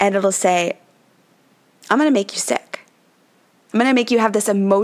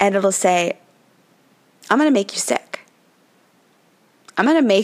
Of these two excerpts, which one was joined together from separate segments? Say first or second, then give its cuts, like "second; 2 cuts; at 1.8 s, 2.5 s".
first; 1 cut; at 3.7 s